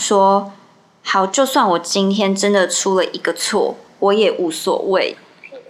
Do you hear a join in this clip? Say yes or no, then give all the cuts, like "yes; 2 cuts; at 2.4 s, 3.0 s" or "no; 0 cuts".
no; 0 cuts